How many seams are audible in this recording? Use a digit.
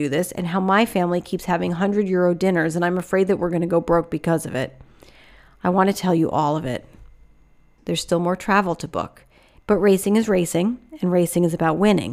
2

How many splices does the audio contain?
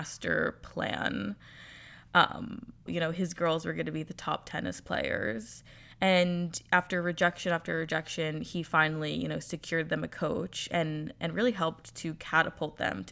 1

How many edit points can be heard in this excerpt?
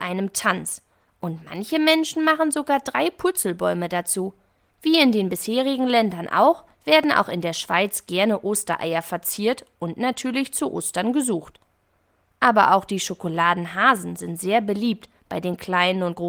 1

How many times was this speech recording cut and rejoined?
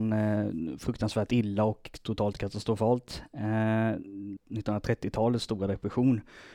1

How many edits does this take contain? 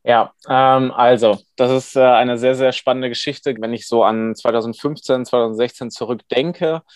1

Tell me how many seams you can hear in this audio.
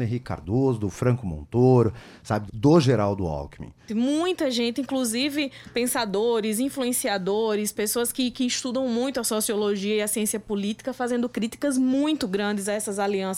2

